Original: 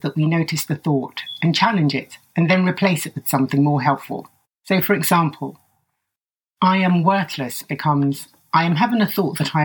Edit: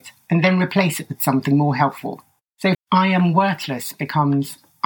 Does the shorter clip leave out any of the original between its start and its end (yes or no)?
yes